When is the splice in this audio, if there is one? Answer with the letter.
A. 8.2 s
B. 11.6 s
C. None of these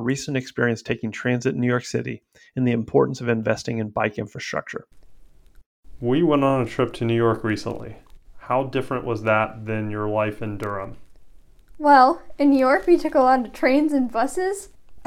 C